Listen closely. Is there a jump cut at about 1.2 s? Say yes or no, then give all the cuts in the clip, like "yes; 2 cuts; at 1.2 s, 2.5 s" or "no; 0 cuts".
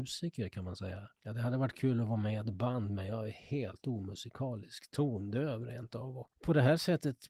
no; 0 cuts